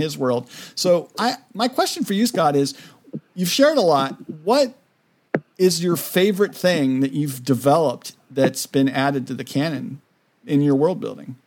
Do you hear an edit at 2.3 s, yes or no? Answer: no